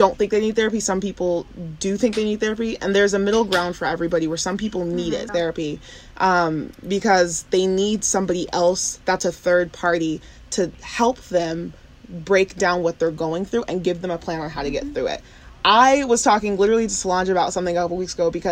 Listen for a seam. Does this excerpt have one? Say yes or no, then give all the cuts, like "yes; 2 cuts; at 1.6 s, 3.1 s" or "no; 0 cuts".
yes; 1 cut; at 5.3 s